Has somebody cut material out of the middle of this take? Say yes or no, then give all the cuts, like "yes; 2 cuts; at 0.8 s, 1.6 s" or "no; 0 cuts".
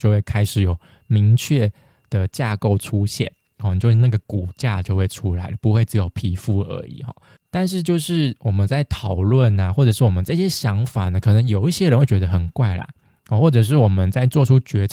no; 0 cuts